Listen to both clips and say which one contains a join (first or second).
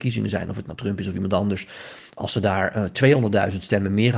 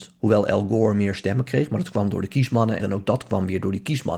second